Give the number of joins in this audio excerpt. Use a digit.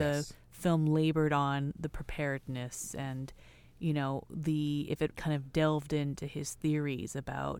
1